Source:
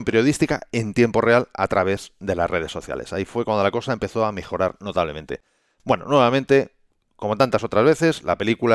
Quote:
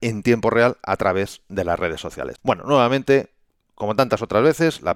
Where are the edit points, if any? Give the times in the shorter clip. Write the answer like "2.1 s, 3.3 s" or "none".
2.4 s